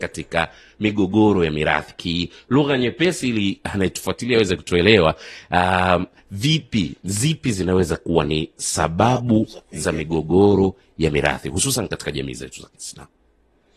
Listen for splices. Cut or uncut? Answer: uncut